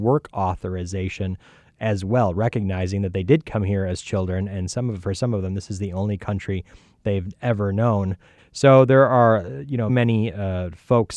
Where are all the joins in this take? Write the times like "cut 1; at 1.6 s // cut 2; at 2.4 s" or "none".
cut 1; at 8.4 s // cut 2; at 9.9 s

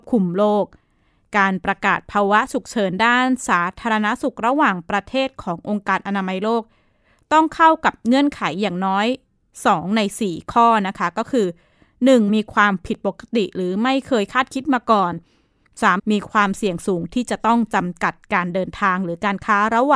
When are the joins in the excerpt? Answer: cut 1; at 12.3 s // cut 2; at 16.0 s

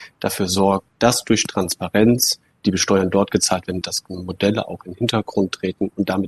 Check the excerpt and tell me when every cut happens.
cut 1; at 2.6 s // cut 2; at 3.8 s

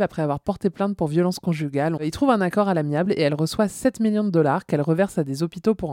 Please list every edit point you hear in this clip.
cut 1; at 2.0 s

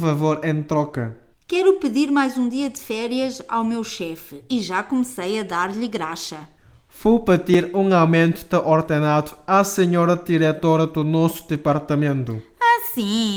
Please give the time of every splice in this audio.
cut 1; at 1.3 s

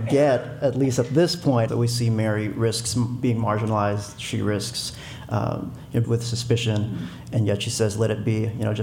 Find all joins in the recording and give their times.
cut 1; at 1.7 s // cut 2; at 6.0 s

